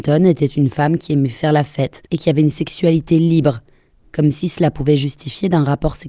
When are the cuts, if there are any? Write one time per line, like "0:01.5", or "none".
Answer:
0:02.1